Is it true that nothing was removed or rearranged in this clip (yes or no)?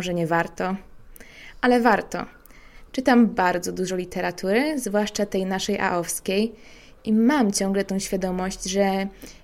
no